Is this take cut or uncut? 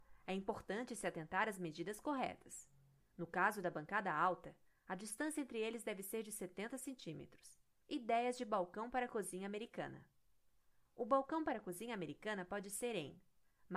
cut